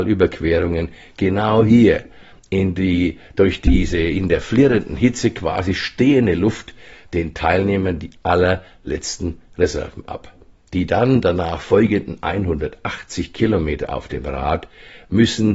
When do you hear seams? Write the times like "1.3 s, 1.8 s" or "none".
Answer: 10.6 s